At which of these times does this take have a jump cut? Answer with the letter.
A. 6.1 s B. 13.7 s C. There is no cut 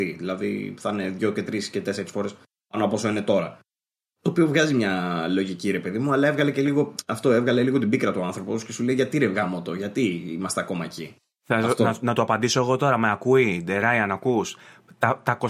C